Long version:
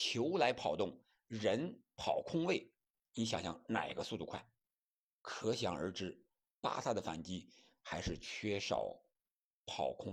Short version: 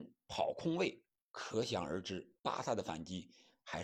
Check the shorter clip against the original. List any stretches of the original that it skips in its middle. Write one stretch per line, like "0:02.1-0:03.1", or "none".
0:02.9-0:05.1
0:06.3-0:06.6